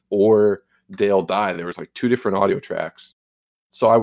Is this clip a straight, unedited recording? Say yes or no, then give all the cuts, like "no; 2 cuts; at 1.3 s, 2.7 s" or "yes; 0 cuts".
yes; 0 cuts